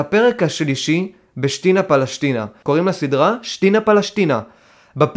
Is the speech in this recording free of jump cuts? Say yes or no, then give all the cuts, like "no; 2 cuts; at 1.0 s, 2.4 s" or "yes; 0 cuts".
no; 1 cut; at 2.6 s